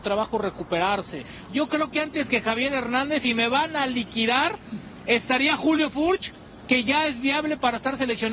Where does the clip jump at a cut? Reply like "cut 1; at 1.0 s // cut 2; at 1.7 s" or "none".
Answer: cut 1; at 1.5 s